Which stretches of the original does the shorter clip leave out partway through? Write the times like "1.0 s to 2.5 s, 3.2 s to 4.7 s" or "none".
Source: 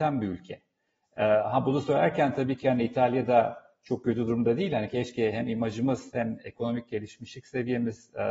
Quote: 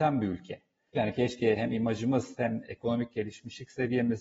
0.9 s to 4.7 s